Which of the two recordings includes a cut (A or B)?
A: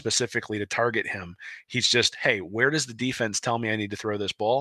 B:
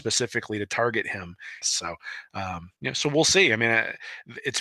B